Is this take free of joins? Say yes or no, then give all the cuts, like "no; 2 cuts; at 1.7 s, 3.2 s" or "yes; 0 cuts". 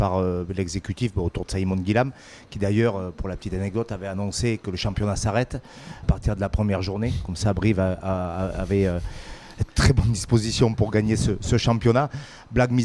no; 1 cut; at 6.0 s